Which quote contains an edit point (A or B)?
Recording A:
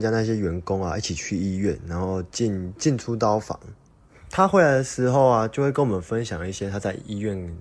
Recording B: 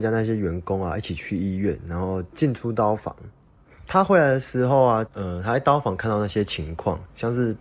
B